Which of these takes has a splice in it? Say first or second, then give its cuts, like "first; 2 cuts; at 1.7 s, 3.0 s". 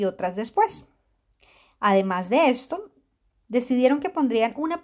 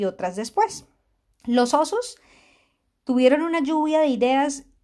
second; 1 cut; at 1.4 s